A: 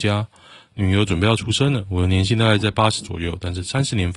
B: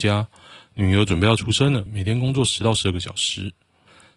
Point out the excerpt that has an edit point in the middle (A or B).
B